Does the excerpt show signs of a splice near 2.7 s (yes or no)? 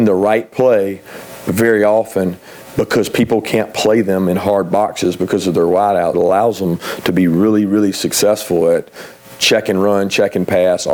no